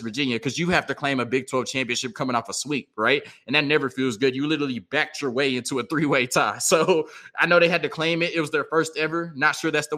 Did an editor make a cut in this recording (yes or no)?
no